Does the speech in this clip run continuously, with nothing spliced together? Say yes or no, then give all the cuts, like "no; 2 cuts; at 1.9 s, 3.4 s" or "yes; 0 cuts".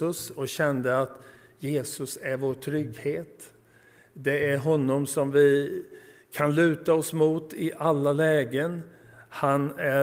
yes; 0 cuts